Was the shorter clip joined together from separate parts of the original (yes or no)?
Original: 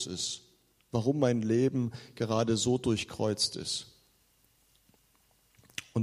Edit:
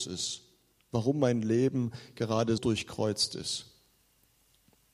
yes